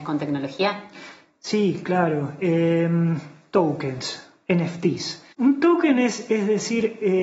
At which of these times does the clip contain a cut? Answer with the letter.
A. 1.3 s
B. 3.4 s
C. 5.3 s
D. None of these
C